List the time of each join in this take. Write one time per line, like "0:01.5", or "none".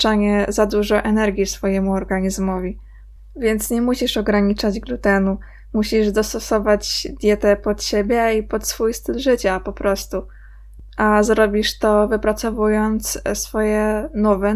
none